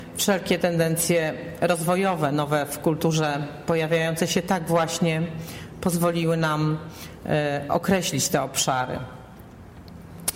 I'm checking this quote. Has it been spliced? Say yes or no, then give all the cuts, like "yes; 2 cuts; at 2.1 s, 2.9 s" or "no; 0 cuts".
no; 0 cuts